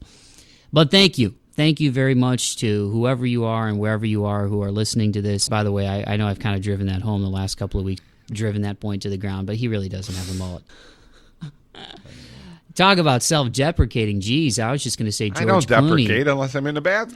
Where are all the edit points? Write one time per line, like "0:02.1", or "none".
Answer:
0:05.5
0:08.0
0:10.7